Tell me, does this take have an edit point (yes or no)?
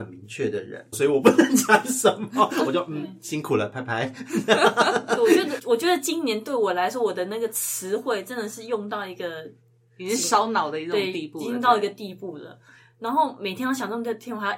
yes